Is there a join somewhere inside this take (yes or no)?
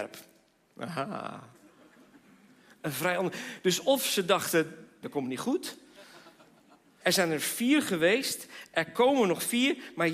yes